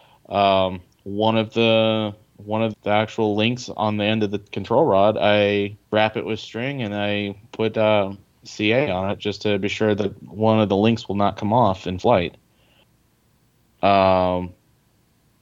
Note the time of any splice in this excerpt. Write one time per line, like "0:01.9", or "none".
0:02.7
0:05.8